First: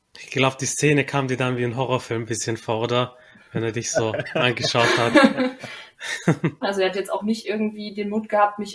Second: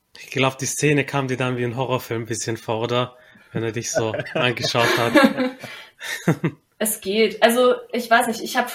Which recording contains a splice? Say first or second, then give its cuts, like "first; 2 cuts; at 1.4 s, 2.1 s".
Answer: first; 1 cut; at 6.6 s